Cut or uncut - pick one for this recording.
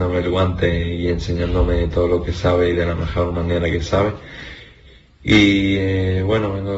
uncut